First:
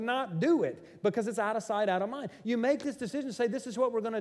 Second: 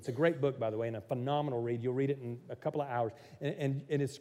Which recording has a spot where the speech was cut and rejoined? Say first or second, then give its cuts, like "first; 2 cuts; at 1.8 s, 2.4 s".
first; 1 cut; at 2.4 s